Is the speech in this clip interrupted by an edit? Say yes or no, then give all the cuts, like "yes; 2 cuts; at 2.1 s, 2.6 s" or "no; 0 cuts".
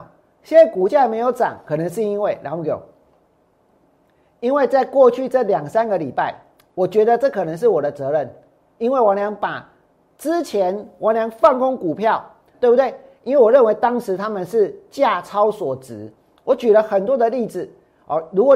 yes; 1 cut; at 12.5 s